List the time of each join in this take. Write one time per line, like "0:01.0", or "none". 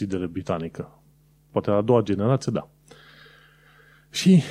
none